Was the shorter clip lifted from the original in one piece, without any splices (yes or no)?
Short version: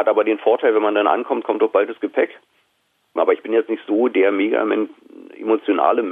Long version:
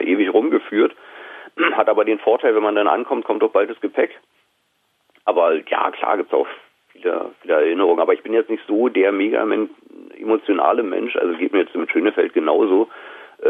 no